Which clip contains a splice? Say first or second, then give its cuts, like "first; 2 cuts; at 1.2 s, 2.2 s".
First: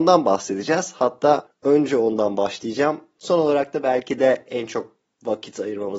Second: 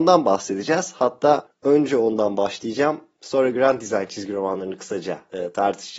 first; 1 cut; at 3.2 s